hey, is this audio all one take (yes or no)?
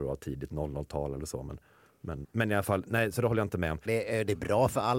no